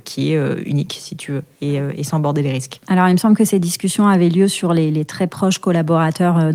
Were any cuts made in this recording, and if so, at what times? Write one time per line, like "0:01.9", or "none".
none